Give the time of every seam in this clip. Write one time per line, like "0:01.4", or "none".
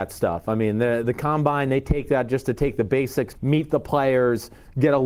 0:01.0
0:03.3